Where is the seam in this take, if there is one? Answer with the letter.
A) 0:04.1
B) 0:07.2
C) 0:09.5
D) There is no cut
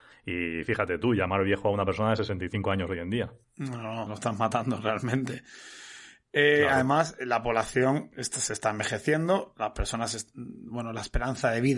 A